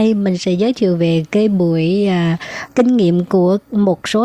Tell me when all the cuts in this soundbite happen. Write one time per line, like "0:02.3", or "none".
0:02.7